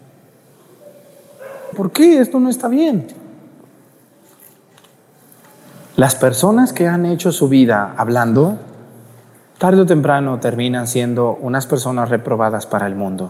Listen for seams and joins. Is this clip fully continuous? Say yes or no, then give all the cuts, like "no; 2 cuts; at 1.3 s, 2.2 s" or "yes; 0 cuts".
no; 1 cut; at 1.7 s